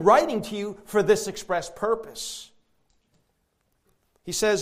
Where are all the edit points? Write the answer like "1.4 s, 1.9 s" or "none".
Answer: none